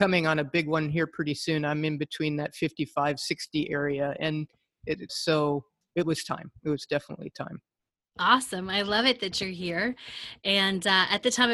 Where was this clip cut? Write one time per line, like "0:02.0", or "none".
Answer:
0:05.1